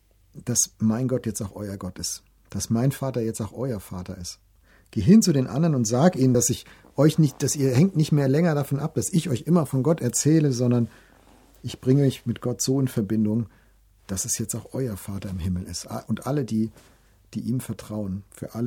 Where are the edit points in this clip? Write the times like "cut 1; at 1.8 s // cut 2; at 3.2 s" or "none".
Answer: none